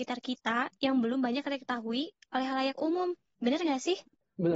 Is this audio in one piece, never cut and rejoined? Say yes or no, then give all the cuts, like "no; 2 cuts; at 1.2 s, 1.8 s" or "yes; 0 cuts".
yes; 0 cuts